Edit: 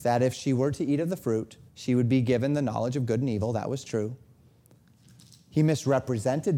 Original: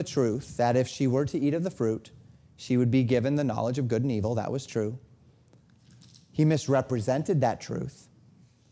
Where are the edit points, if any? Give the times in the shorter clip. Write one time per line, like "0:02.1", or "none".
0:01.7